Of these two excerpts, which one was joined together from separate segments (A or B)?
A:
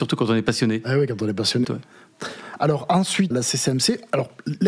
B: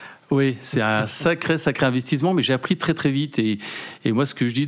A